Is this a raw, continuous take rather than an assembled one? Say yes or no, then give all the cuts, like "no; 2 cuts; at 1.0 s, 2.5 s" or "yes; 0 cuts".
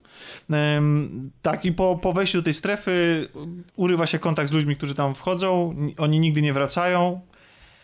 no; 1 cut; at 3.7 s